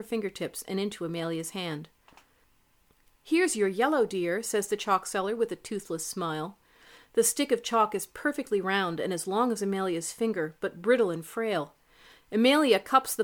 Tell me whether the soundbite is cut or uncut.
cut